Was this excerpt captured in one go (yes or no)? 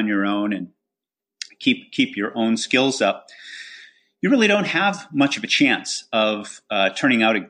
yes